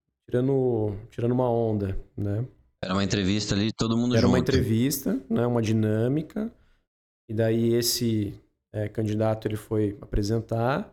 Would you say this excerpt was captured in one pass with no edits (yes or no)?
yes